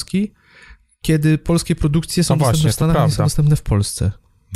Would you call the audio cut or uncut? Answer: uncut